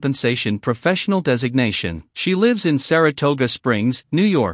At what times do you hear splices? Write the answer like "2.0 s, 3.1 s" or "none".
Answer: 2.1 s